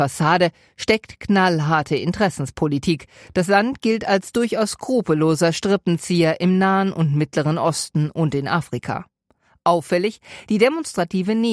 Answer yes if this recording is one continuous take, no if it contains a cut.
yes